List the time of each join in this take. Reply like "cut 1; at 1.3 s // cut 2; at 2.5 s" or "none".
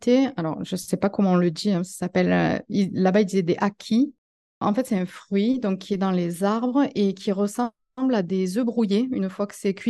none